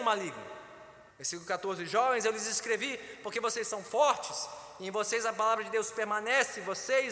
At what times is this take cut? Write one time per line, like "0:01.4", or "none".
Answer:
0:01.1